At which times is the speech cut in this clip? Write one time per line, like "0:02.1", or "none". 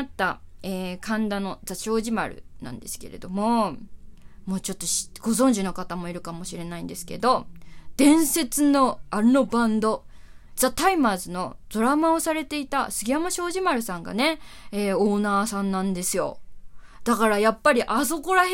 0:10.6